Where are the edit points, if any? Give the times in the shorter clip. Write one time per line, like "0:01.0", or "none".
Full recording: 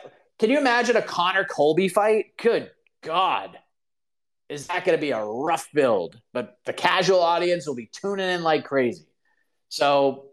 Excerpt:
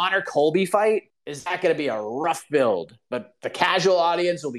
0:01.1

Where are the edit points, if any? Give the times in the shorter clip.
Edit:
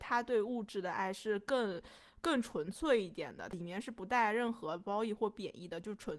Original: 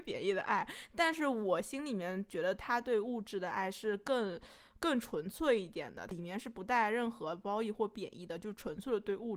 none

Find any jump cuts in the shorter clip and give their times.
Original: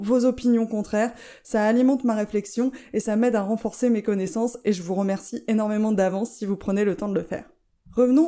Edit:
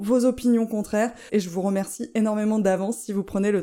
0:01.3

